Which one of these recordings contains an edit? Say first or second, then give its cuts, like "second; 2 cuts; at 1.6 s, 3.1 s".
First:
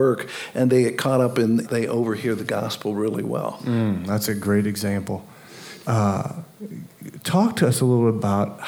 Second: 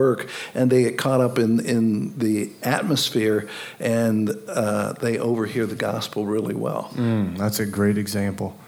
first; 2 cuts; at 1.6 s, 5.8 s